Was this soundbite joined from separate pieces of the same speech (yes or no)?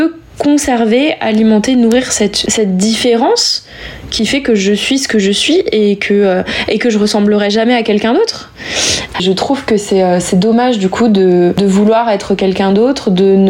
yes